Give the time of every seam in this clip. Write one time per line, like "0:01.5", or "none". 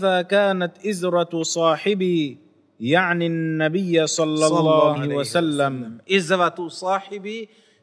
0:05.0